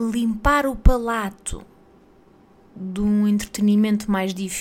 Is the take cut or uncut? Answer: uncut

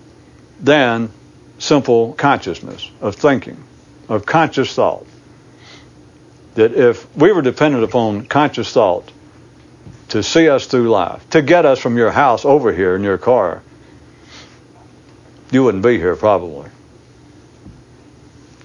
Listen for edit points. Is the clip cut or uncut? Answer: cut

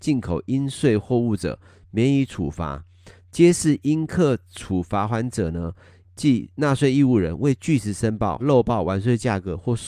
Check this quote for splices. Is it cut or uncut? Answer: cut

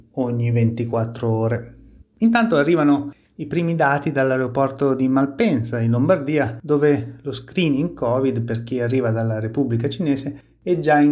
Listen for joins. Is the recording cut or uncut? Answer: cut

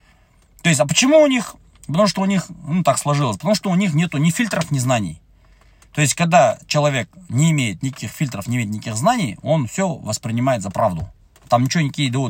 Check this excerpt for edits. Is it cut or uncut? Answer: uncut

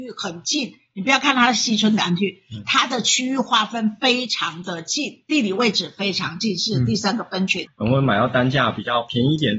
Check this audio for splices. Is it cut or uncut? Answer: cut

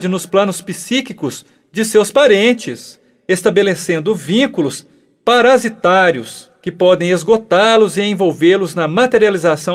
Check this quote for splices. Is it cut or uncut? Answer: uncut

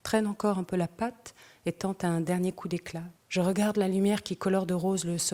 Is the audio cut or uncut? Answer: cut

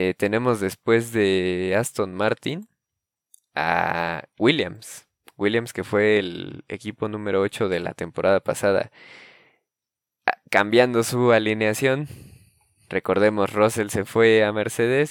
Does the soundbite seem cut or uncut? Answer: uncut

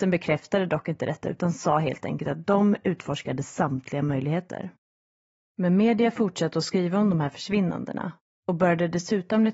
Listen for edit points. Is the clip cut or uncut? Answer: uncut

